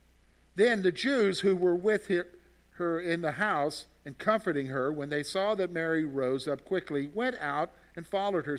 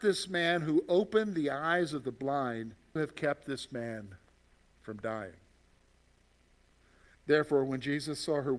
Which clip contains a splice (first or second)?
second